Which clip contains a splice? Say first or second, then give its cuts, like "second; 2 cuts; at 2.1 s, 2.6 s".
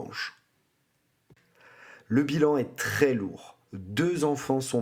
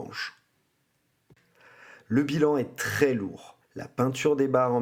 second; 1 cut; at 3.6 s